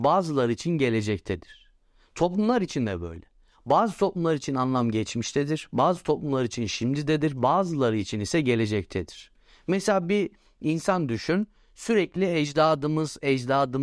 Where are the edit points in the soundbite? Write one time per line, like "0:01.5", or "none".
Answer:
none